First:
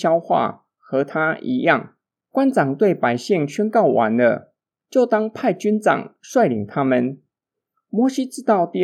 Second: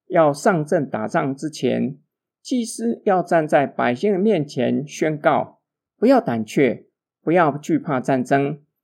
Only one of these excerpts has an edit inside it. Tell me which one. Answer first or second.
second